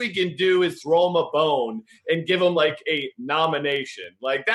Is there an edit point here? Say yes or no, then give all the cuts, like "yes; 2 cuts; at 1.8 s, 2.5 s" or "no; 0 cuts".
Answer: no; 0 cuts